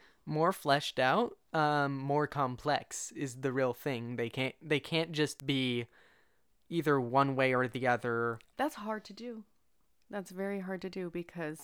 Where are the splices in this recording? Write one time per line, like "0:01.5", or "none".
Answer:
0:08.5